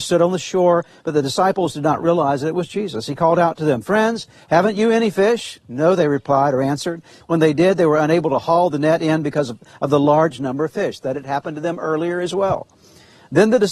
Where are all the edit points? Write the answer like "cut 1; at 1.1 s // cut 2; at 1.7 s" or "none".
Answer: cut 1; at 7.2 s